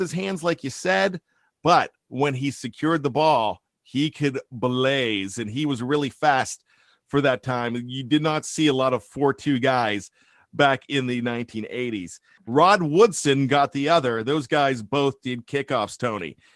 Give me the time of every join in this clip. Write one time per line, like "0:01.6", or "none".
0:12.4